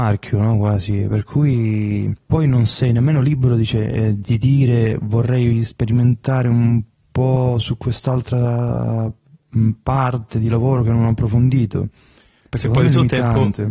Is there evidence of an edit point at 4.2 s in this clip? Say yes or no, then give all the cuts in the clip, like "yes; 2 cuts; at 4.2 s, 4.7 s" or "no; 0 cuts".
yes; 1 cut; at 4.2 s